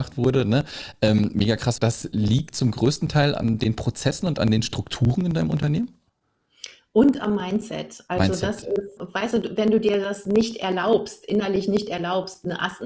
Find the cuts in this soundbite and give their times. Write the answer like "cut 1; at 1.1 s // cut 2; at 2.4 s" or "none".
cut 1; at 1.8 s // cut 2; at 9.0 s